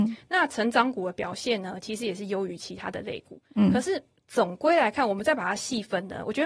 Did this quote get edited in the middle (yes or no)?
no